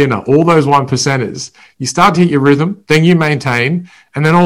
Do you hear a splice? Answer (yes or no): no